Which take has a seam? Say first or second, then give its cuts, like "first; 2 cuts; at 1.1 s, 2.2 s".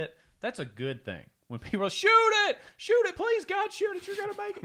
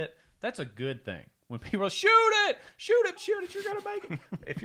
second; 1 cut; at 3.2 s